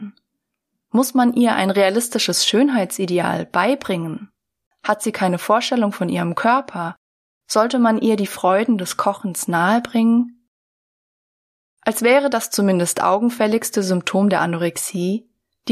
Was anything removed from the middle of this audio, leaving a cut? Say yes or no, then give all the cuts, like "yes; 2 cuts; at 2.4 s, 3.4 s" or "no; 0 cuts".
yes; 2 cuts; at 4.7 s, 7.3 s